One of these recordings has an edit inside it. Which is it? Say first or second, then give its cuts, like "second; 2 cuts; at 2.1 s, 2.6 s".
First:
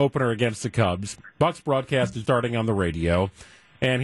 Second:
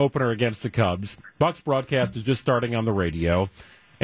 first; 1 cut; at 2.2 s